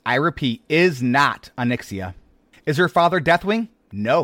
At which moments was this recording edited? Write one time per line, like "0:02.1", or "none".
0:02.5